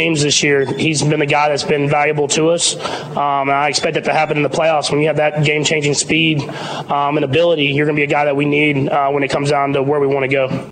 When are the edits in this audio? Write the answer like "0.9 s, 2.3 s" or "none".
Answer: 1.9 s